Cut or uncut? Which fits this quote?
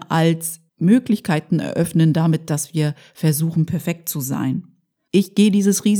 cut